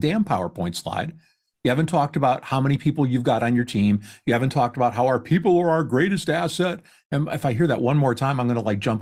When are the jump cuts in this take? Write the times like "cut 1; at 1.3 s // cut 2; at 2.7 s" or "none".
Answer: none